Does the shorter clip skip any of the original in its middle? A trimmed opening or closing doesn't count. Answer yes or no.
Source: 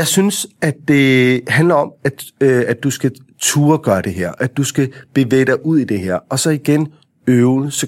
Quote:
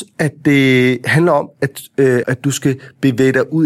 yes